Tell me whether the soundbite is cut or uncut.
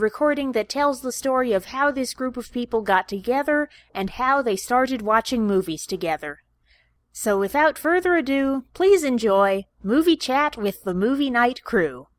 uncut